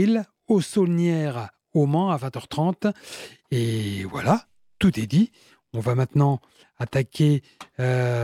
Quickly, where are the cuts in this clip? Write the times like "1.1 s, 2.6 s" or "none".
none